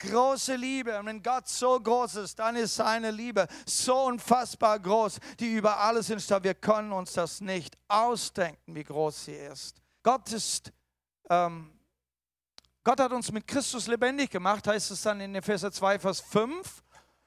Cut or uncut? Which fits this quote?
cut